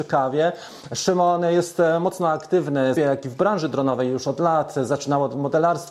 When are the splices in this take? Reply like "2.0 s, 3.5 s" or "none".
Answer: 3.0 s